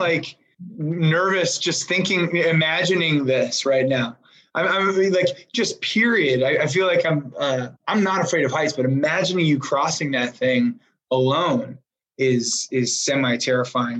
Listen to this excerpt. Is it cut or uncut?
uncut